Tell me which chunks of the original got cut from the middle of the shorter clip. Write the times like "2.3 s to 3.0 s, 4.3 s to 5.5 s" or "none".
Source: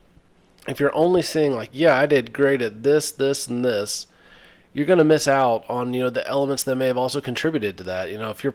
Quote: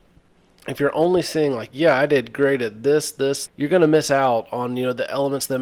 3.5 s to 4.6 s